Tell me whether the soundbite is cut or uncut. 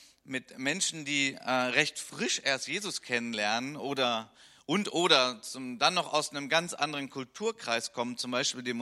uncut